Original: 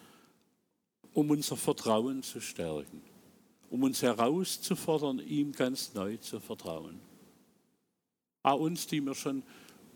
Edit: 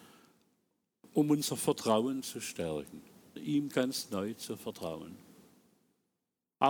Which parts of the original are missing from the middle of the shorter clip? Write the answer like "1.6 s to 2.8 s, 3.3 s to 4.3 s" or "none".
3.4 s to 5.2 s